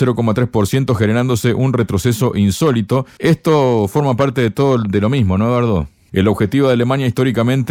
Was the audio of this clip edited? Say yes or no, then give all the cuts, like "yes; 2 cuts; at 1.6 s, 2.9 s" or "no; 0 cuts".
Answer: yes; 2 cuts; at 3.2 s, 6.1 s